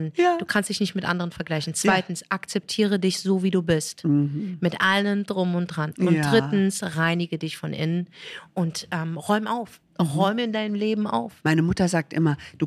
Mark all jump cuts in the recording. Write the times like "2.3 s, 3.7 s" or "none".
11.4 s

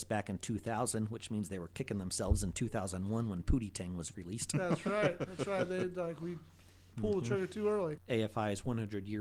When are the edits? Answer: 8.0 s

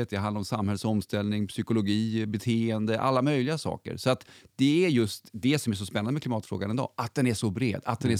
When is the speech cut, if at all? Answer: none

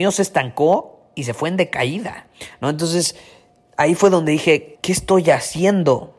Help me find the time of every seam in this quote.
4.8 s

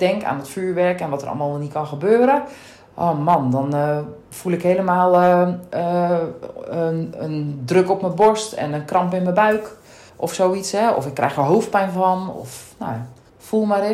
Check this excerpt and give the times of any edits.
none

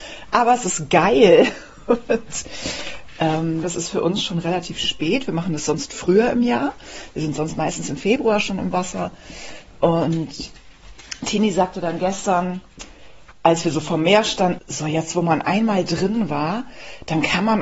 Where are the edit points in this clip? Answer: 3.6 s, 13.3 s, 14.6 s

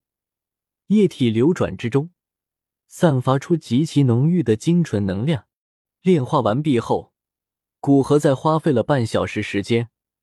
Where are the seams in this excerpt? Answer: none

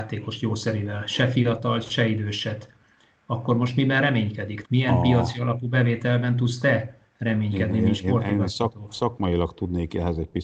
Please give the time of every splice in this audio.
4.6 s

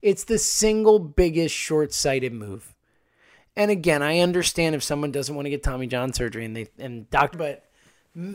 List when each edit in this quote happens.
7.3 s

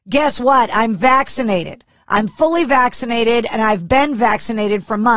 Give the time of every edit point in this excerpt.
none

